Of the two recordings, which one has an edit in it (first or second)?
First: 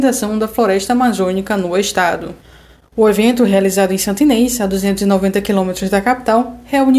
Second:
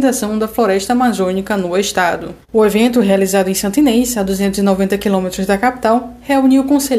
second